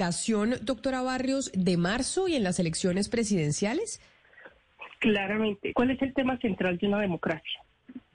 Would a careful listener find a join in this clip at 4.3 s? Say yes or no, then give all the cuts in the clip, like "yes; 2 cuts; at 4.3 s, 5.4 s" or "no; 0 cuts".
no; 2 cuts; at 1.5 s, 5.7 s